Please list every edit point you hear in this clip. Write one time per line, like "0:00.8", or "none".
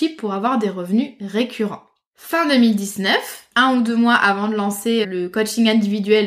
0:02.1
0:03.5
0:05.0

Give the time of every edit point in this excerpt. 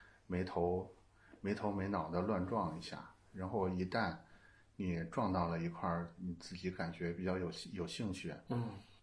none

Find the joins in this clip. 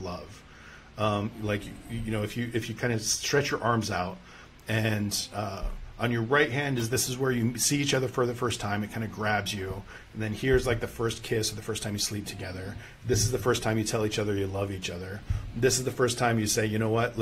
none

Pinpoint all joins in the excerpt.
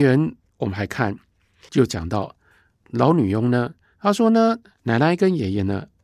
0:03.9

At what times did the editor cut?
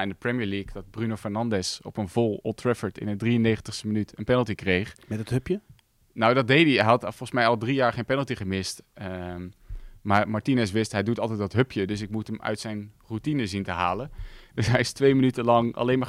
none

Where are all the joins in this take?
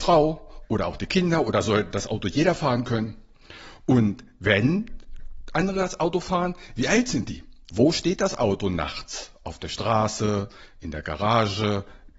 0:07.7

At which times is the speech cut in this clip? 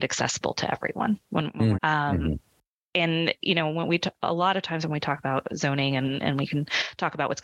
0:01.7

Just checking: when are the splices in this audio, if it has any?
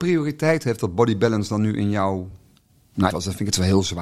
0:03.1

